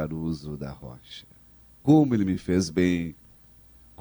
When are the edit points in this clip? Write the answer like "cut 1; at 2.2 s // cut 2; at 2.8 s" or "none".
cut 1; at 1.8 s